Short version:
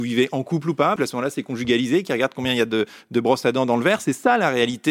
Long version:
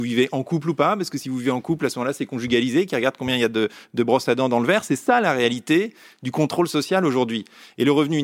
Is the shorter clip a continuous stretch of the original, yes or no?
no